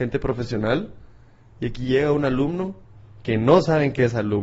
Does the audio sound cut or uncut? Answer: uncut